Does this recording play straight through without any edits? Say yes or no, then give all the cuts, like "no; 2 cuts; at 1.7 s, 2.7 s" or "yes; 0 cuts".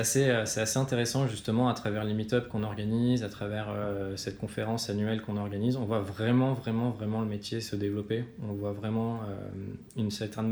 yes; 0 cuts